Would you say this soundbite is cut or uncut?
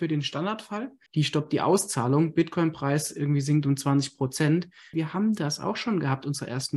cut